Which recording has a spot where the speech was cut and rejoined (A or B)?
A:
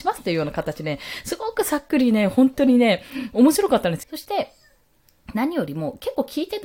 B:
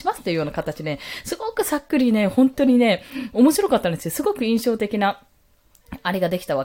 A